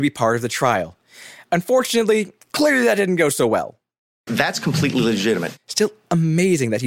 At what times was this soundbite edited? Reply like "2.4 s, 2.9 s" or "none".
2.4 s, 4.3 s